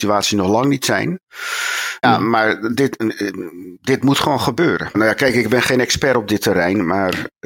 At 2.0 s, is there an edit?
yes; 2 cuts; at 2.0 s, 4.9 s

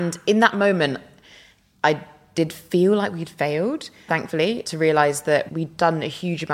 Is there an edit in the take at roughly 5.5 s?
yes; 2 cuts; at 4.1 s, 5.5 s

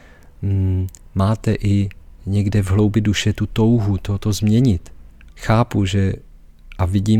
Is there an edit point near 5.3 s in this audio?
yes; 2 cuts; at 2.2 s, 5.3 s

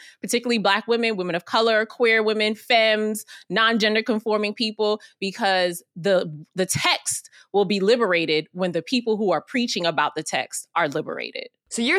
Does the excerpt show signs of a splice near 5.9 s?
no; 0 cuts

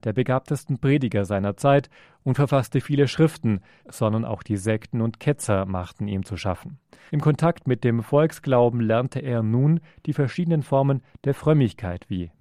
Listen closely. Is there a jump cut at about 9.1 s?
no; 2 cuts; at 3.8 s, 7.1 s

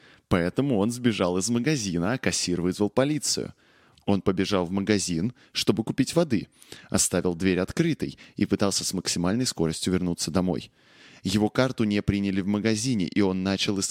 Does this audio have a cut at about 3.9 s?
yes; 1 cut; at 3.9 s

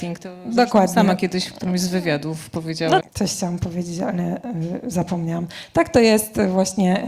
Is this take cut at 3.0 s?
yes; 1 cut; at 3.0 s

